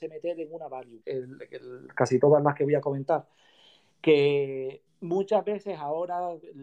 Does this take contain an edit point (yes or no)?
yes